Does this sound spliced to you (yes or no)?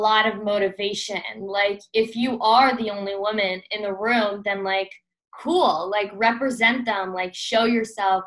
no